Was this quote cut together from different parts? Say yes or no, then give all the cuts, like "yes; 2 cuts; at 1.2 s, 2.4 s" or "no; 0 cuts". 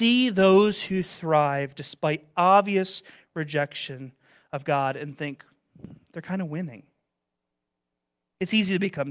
no; 0 cuts